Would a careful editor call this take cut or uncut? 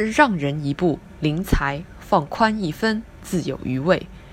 cut